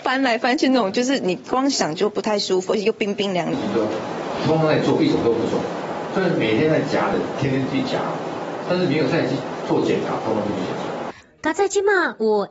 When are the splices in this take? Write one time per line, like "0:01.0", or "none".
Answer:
none